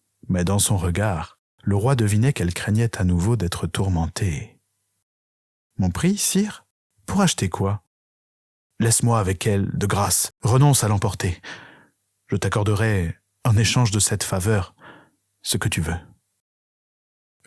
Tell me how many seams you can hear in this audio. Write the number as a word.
zero